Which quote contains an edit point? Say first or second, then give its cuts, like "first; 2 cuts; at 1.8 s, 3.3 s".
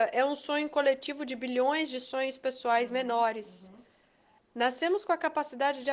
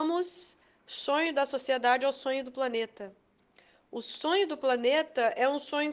first; 1 cut; at 4.4 s